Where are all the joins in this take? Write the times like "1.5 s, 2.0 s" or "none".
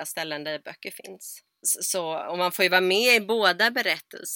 1.6 s